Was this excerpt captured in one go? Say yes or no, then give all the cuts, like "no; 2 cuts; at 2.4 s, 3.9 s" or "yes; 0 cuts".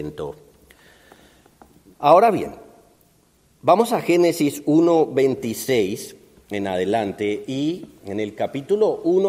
no; 2 cuts; at 1.9 s, 8.0 s